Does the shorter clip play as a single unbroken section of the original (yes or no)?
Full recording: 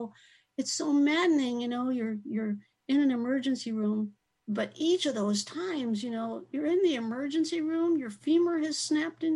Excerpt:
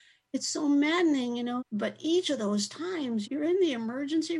no